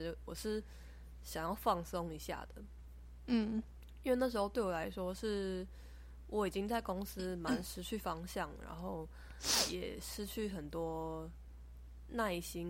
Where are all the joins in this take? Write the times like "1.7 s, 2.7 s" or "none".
none